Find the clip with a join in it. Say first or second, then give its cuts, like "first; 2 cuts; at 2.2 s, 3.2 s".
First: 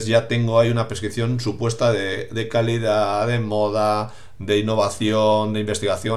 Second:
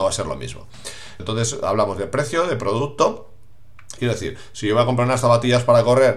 second; 2 cuts; at 1.2 s, 4.0 s